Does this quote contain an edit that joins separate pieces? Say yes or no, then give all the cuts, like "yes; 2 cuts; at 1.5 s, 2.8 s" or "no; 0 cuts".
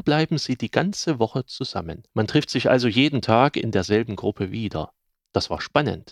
yes; 1 cut; at 2.1 s